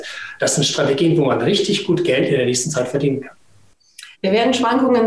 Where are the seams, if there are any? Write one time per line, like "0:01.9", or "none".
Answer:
0:04.1